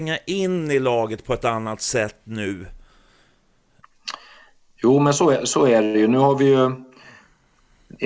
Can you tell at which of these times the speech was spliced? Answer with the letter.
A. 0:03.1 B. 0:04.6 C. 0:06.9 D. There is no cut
D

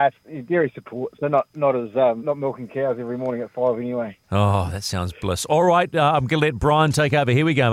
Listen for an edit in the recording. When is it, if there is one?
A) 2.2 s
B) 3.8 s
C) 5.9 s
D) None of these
A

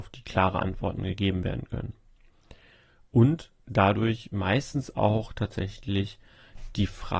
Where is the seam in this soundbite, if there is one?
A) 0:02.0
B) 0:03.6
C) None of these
B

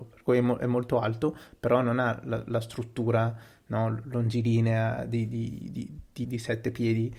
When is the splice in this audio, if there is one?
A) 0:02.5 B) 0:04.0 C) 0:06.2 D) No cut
C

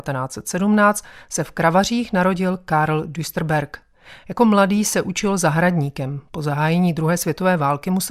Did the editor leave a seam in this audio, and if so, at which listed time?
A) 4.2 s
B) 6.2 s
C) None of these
C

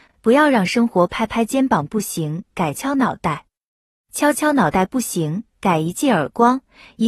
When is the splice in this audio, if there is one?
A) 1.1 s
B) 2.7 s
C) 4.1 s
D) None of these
B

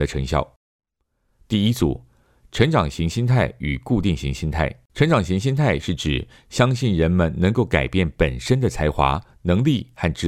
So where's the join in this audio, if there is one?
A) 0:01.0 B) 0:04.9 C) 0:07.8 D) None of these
B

